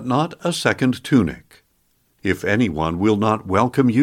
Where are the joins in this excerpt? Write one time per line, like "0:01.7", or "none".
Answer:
0:02.1